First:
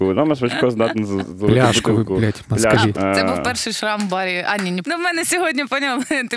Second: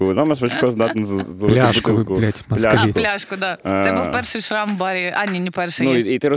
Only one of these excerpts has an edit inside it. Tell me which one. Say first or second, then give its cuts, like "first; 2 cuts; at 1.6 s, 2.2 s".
first; 2 cuts; at 2.9 s, 4.8 s